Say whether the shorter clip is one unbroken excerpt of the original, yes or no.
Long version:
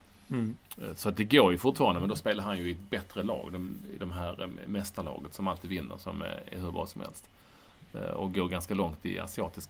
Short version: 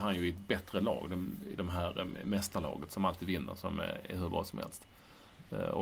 yes